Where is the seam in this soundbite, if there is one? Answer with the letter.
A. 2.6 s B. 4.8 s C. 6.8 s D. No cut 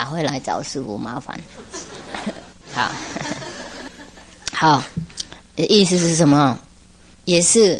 A